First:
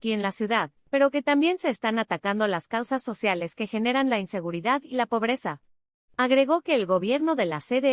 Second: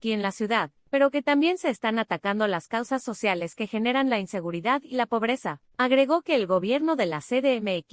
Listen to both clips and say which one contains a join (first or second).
second